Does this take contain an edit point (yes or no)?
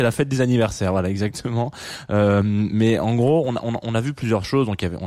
no